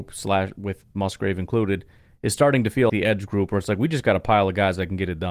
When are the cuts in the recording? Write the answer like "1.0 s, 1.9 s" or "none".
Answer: 2.9 s